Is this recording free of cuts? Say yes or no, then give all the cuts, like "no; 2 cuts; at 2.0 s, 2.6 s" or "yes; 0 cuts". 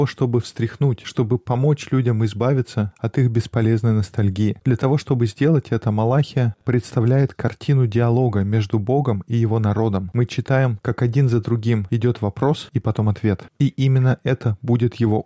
yes; 0 cuts